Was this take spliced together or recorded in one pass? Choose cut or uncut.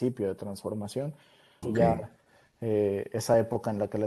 cut